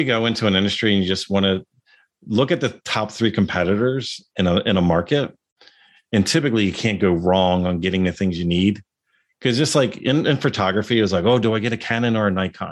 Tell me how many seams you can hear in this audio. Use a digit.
0